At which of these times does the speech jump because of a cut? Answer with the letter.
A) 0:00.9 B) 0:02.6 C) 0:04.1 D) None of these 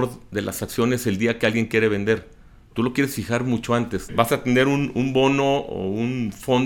C